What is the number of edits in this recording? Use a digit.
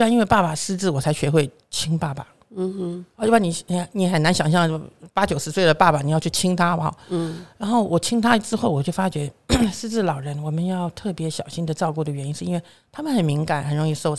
0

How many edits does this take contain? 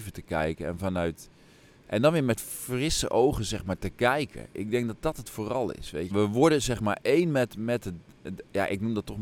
1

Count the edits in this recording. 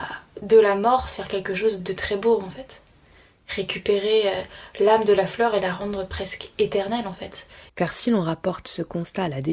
2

